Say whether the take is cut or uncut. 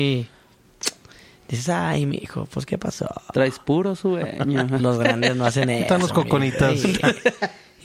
uncut